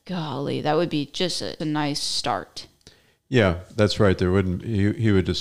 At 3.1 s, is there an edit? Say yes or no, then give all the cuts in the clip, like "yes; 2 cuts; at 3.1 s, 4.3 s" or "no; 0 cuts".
no; 1 cut; at 1.6 s